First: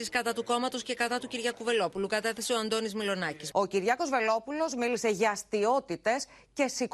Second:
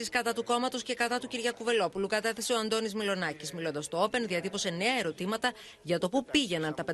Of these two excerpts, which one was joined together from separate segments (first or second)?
first